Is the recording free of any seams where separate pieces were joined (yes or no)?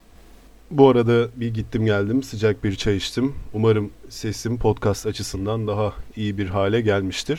yes